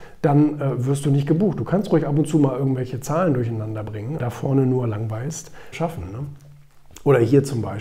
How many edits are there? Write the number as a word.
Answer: two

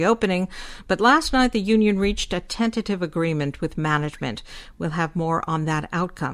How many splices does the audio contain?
zero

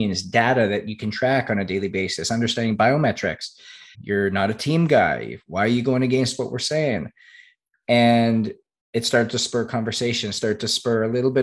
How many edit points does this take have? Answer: one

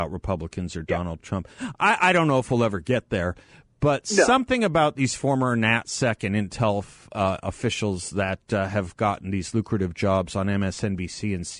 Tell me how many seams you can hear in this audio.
zero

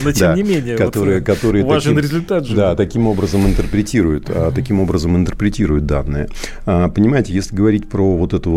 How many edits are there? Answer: zero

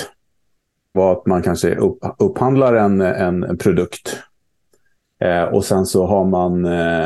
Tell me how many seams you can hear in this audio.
one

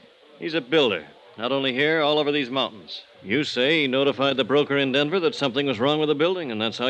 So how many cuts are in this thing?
one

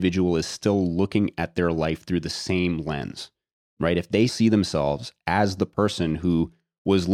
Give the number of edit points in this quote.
one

